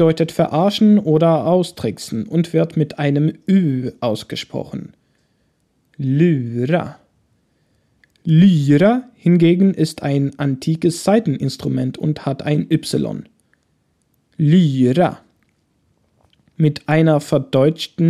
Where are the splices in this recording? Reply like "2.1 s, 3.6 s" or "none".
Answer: none